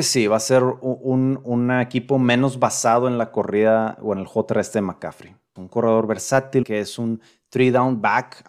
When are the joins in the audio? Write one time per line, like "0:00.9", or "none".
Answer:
0:05.6
0:06.6